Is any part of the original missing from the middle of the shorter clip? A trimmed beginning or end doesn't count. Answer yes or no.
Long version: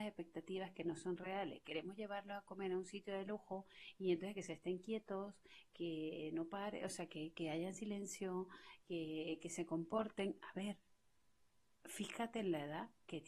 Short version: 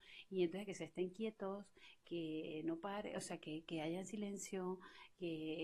no